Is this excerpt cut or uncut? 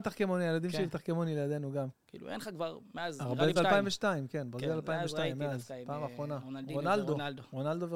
cut